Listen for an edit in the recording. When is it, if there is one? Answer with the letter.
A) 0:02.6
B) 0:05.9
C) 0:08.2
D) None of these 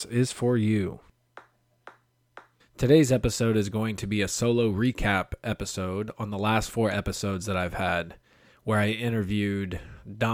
A